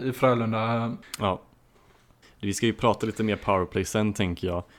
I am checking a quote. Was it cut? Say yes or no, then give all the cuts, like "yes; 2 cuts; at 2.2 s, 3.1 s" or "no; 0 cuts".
yes; 1 cut; at 1.0 s